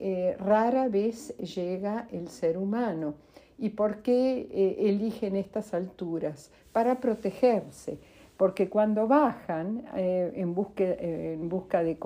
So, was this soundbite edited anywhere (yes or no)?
no